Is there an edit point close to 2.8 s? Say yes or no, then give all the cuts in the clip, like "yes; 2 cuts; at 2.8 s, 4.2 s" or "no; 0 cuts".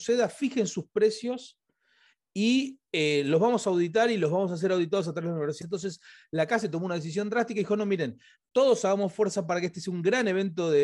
no; 2 cuts; at 5.6 s, 8.4 s